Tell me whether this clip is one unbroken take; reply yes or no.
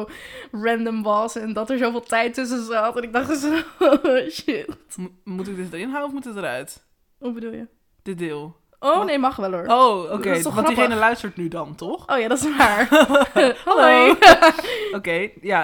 yes